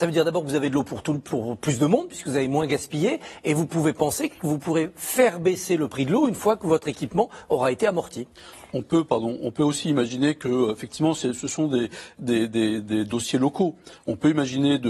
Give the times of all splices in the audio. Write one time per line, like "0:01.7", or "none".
none

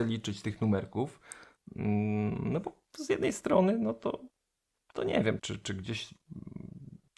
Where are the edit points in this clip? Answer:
0:05.4

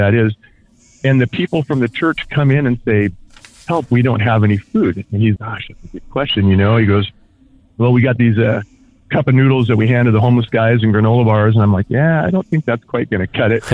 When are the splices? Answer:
0:05.4

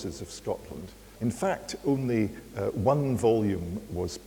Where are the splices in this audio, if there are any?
0:01.1

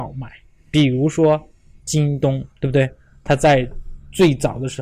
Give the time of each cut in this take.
0:02.5

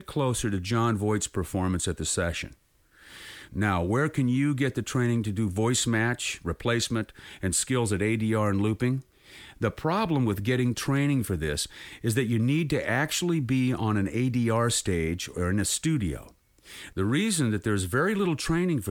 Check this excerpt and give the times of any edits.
none

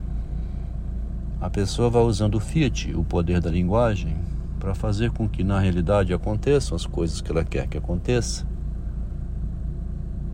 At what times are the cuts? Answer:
0:01.3

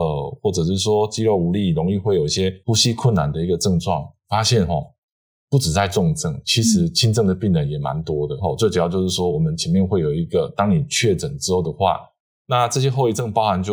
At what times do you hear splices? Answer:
0:08.4
0:12.4

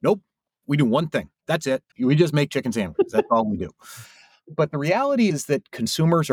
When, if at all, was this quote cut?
0:01.9

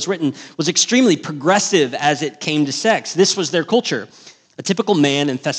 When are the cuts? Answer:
0:04.4

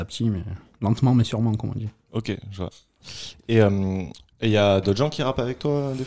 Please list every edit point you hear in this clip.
0:04.3

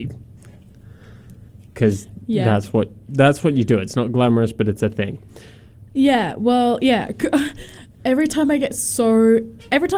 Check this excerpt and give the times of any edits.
0:05.9

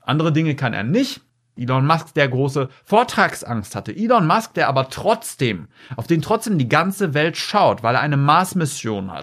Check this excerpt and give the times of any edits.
0:01.6

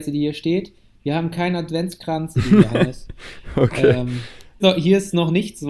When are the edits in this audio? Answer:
0:02.3
0:04.6

